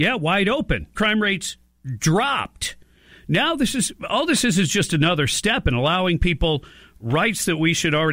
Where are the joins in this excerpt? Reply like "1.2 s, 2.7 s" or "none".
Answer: 0.9 s